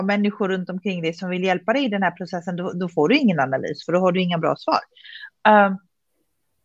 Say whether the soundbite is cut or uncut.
uncut